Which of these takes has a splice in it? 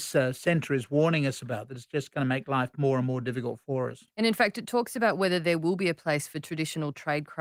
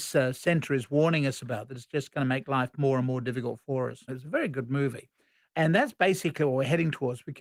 second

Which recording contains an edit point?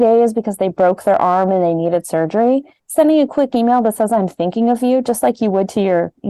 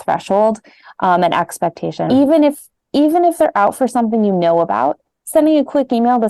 second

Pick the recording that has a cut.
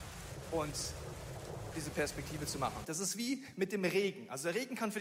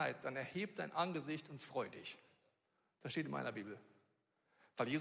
first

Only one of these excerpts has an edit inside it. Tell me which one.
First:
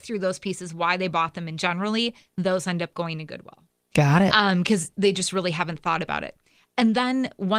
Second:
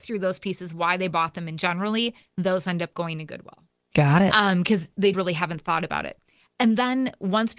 second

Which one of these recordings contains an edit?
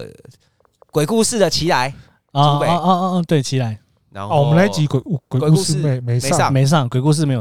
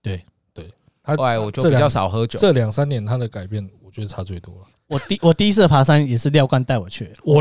second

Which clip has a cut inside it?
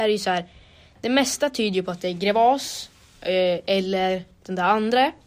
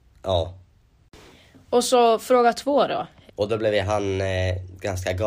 second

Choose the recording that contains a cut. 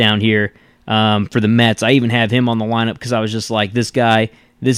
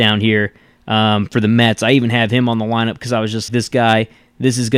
second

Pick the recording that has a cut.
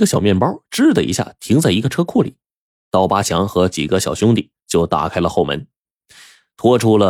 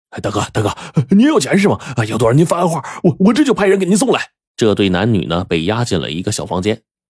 second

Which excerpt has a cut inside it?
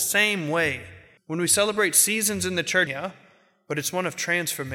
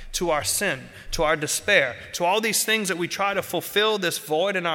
first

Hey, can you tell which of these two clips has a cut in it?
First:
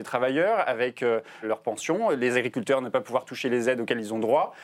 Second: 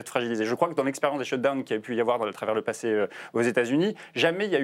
first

